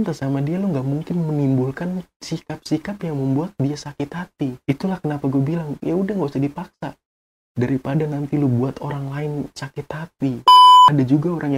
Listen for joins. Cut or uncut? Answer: cut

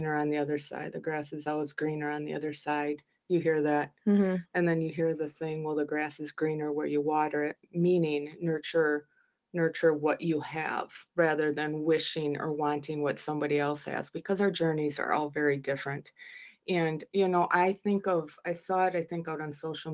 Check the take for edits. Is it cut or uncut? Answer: cut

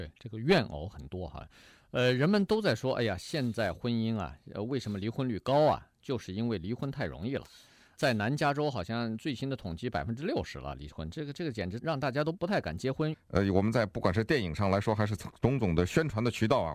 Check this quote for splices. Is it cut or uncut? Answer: cut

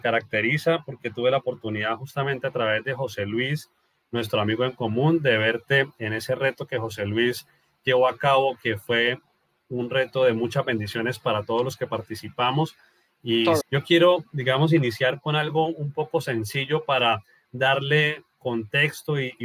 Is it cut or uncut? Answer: cut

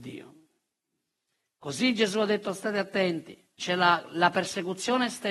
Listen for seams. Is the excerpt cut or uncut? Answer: cut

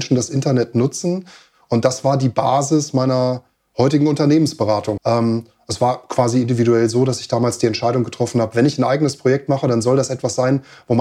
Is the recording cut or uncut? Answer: cut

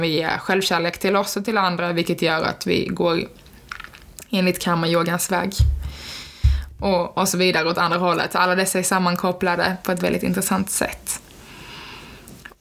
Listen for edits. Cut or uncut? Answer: uncut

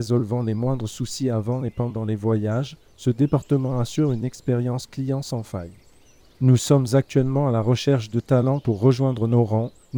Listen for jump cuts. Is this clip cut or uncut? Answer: cut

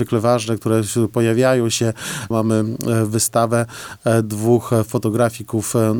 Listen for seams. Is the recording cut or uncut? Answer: cut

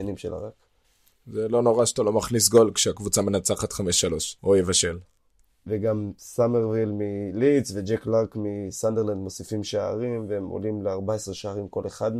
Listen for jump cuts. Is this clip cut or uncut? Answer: cut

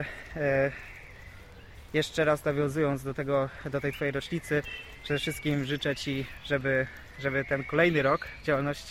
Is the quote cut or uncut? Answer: uncut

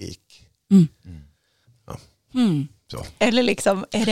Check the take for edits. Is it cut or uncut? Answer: cut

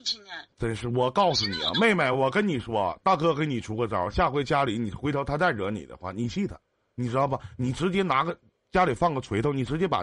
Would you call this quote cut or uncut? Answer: uncut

